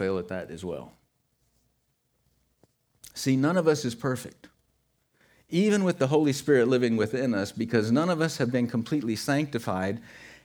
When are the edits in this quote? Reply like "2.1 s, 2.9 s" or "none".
none